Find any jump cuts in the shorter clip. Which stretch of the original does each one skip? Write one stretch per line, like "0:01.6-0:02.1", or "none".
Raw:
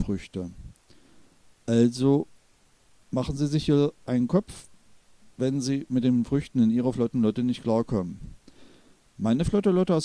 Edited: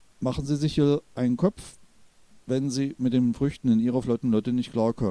none